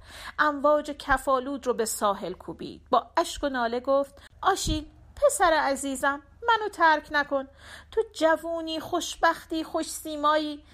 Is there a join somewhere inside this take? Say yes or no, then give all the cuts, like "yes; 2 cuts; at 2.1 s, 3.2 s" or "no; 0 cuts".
yes; 1 cut; at 4.3 s